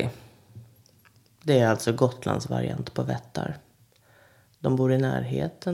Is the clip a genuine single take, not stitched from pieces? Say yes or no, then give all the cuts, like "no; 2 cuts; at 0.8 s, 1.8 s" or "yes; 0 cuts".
yes; 0 cuts